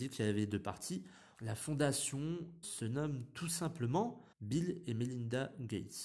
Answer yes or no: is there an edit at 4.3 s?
yes